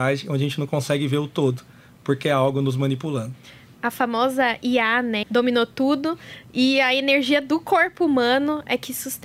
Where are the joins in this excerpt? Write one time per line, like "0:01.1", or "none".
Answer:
0:05.2